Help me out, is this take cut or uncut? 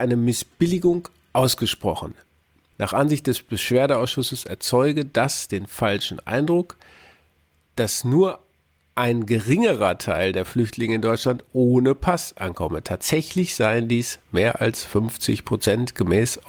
cut